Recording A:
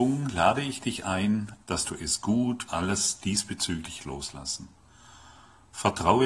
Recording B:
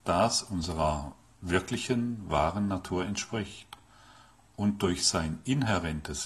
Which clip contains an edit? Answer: A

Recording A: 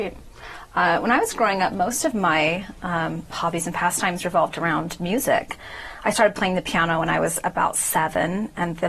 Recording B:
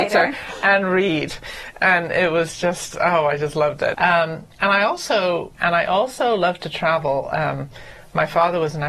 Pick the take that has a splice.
B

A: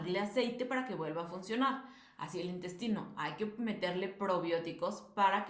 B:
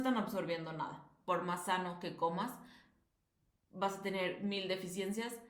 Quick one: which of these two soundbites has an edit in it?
B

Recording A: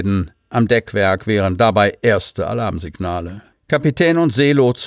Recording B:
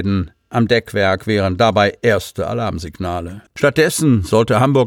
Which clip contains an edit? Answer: B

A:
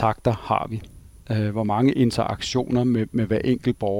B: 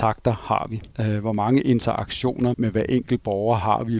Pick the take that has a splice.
B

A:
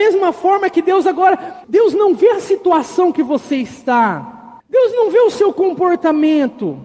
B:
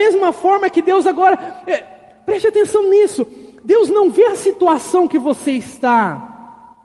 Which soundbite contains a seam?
A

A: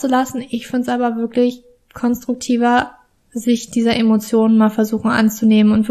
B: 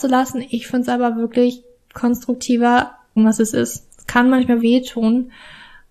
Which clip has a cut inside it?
B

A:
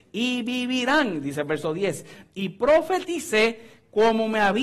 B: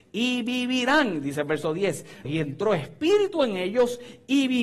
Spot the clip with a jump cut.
B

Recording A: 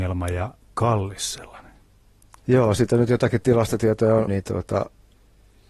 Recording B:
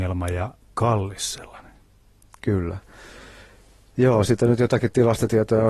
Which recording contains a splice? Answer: A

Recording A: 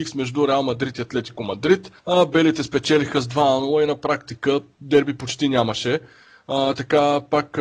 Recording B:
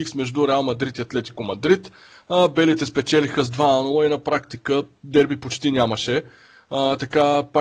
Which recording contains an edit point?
A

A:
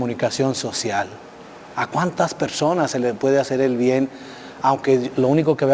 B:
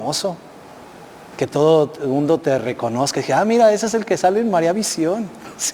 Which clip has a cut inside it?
A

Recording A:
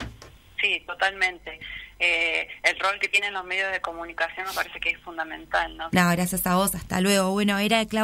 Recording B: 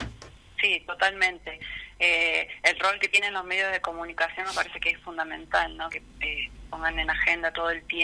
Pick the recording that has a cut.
A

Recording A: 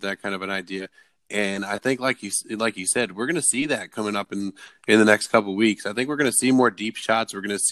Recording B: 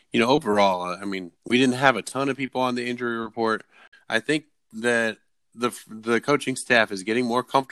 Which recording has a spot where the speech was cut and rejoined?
B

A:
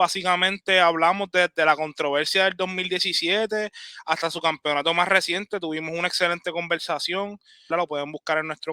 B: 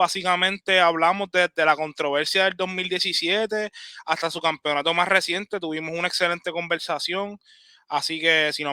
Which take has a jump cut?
A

